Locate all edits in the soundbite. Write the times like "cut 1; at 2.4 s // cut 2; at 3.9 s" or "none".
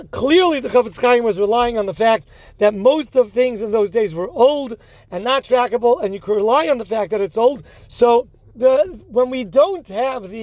cut 1; at 7.8 s